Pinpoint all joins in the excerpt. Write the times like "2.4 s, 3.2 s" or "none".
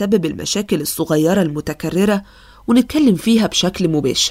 none

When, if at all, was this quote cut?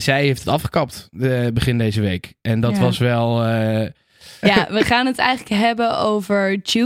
4.4 s

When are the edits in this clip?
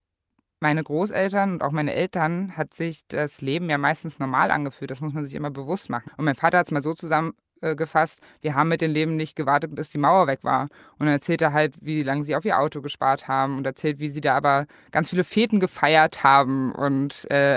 6.1 s

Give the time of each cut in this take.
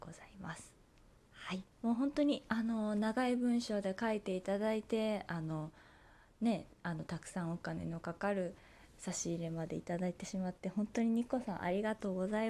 1.7 s

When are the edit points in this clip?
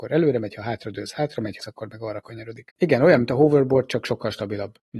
1.6 s, 2.7 s

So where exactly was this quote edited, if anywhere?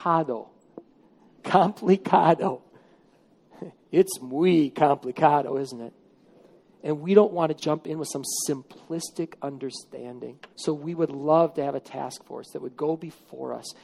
7.6 s, 10.5 s

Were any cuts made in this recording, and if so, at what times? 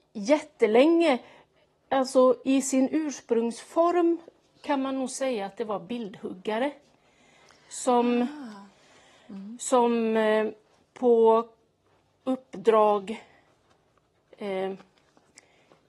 none

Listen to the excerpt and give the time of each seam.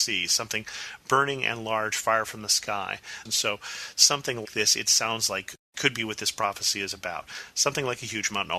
3.3 s, 4.5 s

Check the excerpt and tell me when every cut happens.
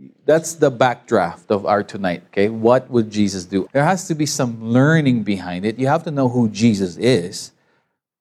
3.7 s

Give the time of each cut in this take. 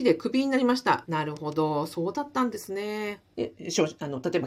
1.1 s, 3.3 s

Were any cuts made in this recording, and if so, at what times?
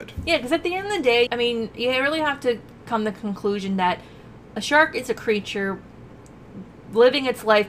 1.3 s

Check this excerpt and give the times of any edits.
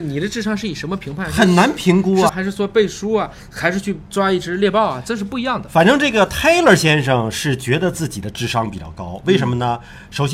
2.3 s

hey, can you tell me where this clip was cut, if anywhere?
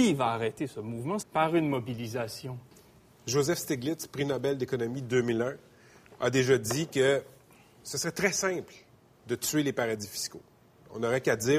1.2 s

